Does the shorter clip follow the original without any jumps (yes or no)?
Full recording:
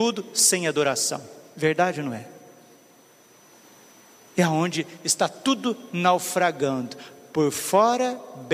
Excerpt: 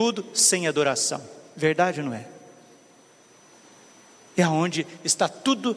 yes